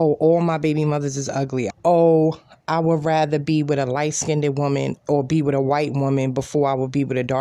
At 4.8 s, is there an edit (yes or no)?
no